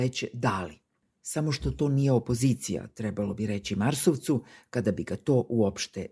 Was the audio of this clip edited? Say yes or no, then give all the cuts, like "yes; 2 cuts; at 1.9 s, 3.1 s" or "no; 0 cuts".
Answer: no; 0 cuts